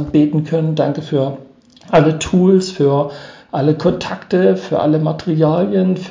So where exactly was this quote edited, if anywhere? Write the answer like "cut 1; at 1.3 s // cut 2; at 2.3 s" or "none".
none